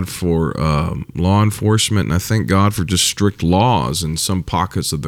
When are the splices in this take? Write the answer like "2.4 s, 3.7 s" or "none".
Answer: none